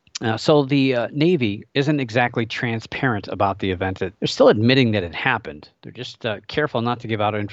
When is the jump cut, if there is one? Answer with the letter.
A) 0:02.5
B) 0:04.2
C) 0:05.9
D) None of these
B